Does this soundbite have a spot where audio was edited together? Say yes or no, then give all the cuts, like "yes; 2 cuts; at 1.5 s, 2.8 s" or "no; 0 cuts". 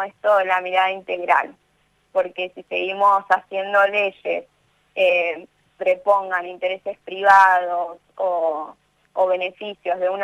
yes; 1 cut; at 5.7 s